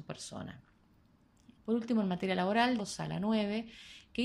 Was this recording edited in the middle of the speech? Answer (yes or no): yes